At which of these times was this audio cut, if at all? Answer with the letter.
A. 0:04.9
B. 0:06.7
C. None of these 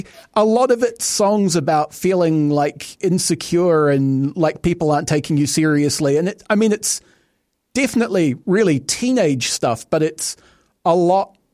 C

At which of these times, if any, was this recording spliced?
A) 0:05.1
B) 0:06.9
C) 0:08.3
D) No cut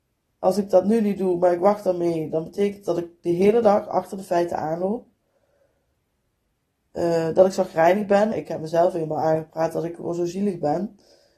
C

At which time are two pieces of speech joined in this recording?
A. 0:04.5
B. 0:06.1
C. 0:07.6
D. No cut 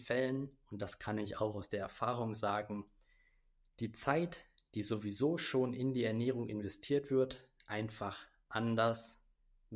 D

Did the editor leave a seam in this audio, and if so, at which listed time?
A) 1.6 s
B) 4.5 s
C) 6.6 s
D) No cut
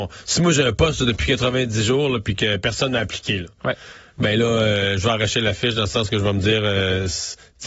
D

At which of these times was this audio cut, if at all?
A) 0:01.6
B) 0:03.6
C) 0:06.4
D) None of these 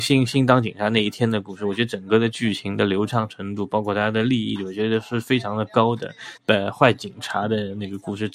C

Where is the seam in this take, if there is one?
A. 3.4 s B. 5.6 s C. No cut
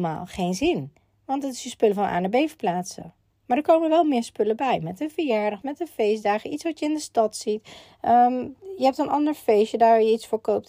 B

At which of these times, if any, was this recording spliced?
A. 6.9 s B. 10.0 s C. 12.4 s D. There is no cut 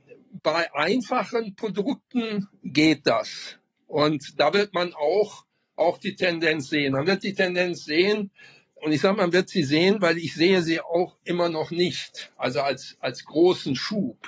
D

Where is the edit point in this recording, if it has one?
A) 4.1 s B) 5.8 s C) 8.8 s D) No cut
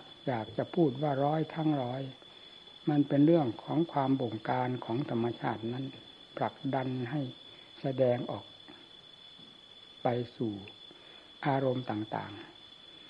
D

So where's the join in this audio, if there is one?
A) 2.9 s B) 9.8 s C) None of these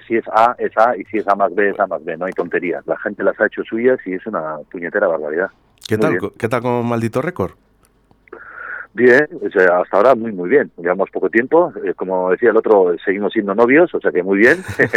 A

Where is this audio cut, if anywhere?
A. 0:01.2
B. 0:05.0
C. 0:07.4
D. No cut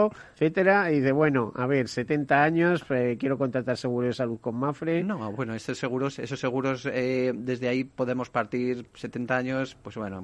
D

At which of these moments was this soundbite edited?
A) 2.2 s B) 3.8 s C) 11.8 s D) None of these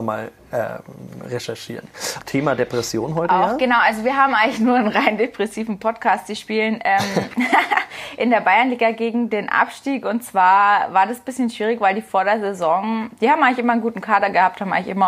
A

